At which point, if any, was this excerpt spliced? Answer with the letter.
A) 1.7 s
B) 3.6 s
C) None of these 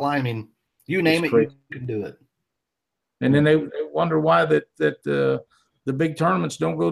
C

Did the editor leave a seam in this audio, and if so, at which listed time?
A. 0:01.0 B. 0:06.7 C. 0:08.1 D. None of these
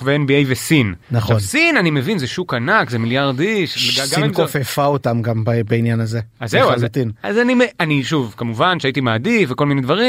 A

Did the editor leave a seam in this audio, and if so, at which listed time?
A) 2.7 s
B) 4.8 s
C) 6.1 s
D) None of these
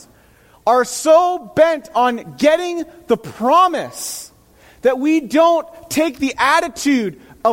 D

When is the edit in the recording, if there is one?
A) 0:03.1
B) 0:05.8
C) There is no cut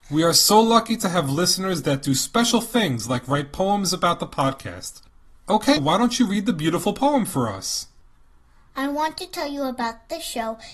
B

